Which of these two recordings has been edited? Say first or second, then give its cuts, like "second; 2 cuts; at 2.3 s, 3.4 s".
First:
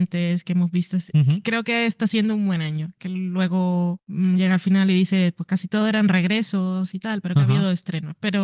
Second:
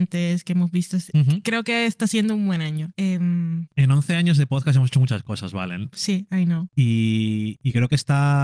second; 2 cuts; at 2.9 s, 6.7 s